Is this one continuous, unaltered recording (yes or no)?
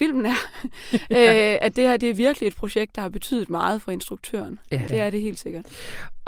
no